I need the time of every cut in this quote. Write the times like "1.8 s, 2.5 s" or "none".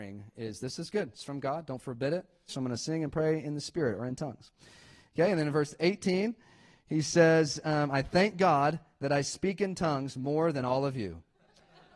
2.5 s